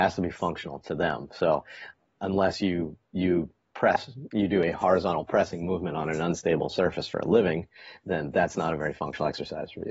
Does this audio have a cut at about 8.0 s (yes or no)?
no